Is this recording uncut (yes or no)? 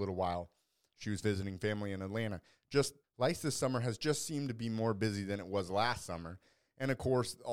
yes